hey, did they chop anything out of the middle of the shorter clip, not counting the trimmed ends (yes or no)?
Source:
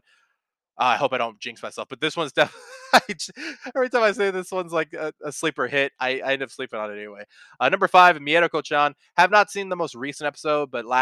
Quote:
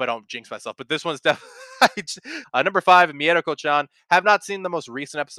yes